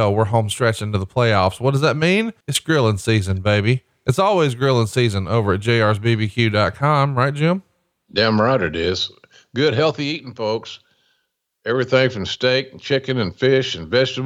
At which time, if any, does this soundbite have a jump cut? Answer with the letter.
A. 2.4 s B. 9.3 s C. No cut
A